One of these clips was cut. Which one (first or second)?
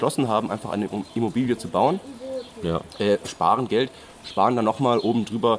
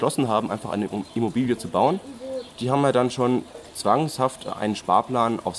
first